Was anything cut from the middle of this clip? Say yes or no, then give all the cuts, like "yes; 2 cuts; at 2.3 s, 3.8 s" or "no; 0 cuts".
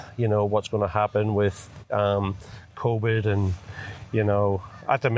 no; 0 cuts